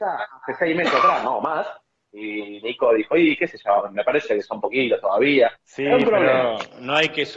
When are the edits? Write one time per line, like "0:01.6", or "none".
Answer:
0:02.0
0:05.6